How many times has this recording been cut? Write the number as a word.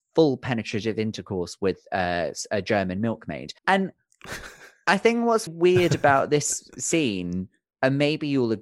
two